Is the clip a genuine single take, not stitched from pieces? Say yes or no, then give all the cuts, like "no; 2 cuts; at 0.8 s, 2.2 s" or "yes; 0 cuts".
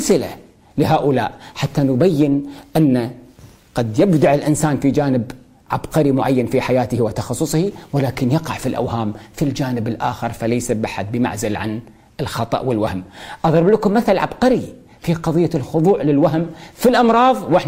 yes; 0 cuts